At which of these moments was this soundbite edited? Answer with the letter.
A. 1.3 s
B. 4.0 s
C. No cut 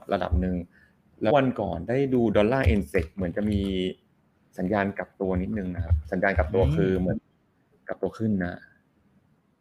A